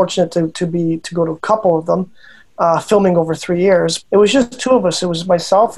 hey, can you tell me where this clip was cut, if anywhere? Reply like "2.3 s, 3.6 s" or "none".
4.0 s